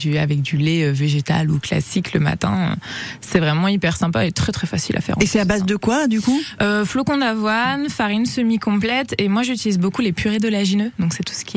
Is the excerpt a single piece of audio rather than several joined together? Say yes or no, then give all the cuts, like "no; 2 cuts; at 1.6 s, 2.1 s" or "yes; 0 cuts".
yes; 0 cuts